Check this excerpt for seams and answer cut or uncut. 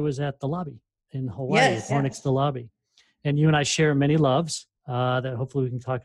cut